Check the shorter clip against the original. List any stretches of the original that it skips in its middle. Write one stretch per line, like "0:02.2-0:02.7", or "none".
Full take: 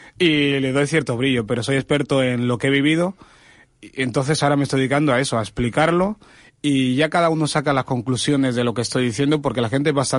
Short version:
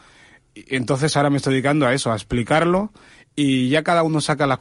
none